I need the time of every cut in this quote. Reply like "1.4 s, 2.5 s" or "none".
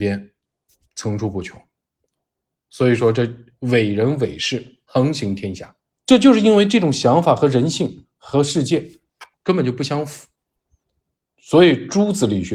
6.0 s, 9.3 s